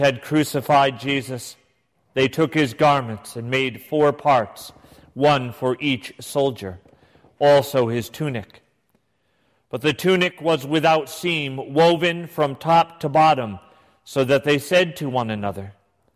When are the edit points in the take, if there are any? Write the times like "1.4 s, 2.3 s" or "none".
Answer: none